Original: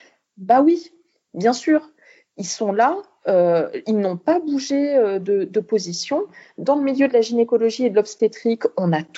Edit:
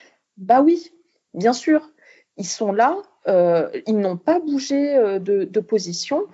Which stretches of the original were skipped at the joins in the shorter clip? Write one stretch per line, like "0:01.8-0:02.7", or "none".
none

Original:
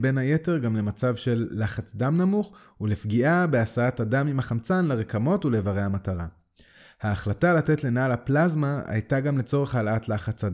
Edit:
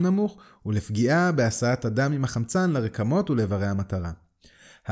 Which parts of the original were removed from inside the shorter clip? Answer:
none

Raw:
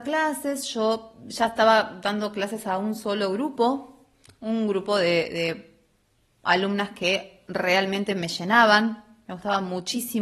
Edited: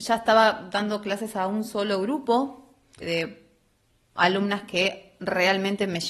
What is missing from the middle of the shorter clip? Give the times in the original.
0:04.3-0:05.3

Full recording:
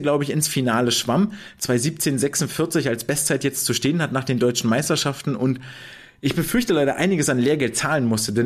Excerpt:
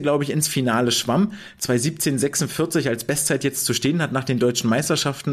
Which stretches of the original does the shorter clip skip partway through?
none

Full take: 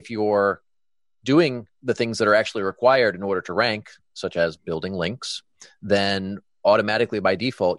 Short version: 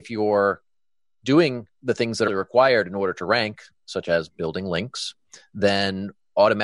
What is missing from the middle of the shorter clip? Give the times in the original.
0:02.3-0:02.6

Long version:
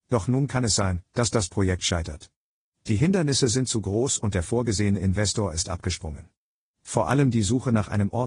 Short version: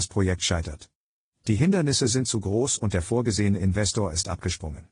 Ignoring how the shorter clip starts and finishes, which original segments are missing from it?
none

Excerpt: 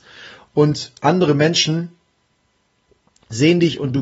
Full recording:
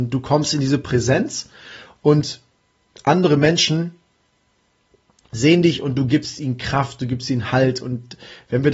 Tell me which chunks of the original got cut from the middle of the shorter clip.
0:02.4-0:03.0

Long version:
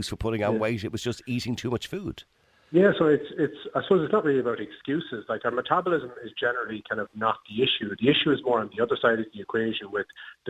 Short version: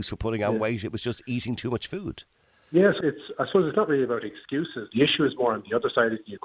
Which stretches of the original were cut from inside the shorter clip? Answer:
0:03.0-0:03.4
0:05.3-0:08.0

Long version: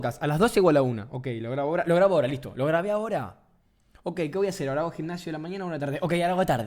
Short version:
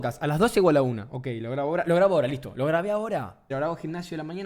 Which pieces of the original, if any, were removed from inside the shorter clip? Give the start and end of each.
0:03.5-0:04.7

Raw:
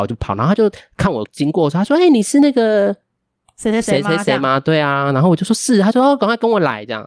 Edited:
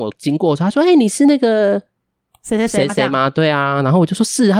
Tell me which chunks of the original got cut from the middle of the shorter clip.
0:04.0-0:04.2

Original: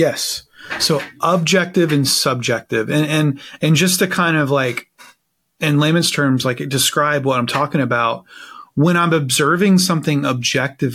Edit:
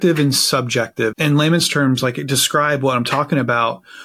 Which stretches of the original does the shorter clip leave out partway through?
0:02.9-0:05.5

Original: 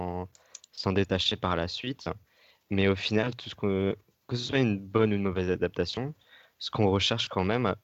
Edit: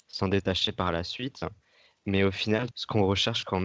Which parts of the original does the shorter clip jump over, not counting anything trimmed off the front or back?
0:03.4-0:06.6

